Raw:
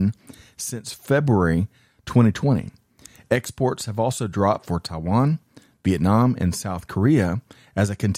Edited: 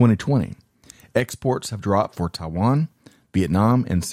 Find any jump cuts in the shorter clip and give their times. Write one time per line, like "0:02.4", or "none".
0:01.8

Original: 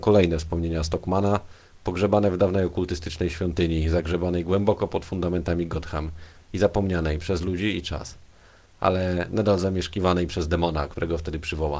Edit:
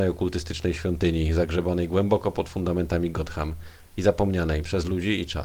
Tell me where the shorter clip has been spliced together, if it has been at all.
none

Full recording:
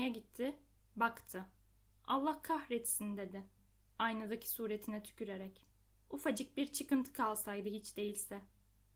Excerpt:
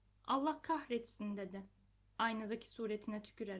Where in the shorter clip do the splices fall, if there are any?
none

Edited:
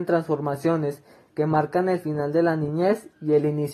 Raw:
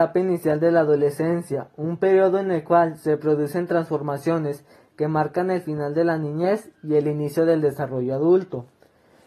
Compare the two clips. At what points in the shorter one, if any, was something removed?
none

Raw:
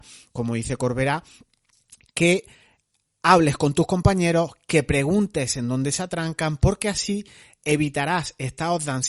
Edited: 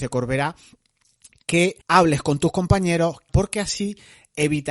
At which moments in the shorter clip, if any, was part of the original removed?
0:01.8
0:03.3

